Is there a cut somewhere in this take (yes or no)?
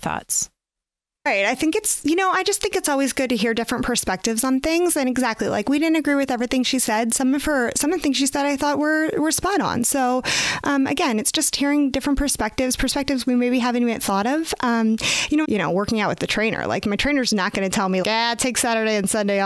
yes